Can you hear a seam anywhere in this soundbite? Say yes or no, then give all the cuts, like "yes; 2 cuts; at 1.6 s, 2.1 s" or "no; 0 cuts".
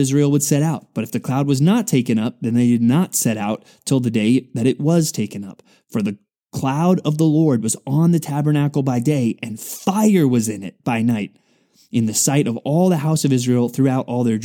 no; 0 cuts